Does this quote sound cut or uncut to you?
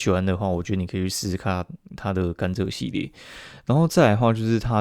uncut